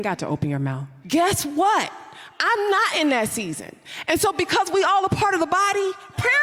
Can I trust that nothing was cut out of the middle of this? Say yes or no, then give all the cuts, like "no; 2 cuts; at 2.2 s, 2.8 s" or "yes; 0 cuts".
no; 1 cut; at 1.0 s